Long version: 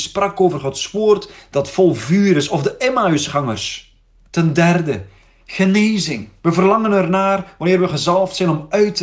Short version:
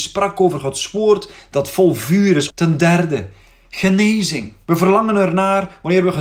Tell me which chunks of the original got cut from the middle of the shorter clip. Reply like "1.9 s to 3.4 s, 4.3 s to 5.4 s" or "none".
2.5 s to 4.2 s